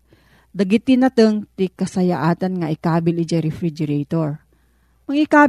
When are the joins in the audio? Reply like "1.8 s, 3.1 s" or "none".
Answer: none